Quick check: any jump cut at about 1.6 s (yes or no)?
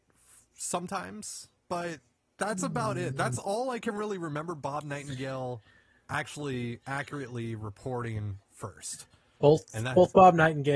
yes